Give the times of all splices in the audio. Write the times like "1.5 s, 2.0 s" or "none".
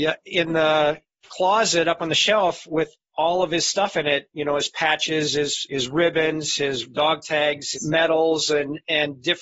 7.7 s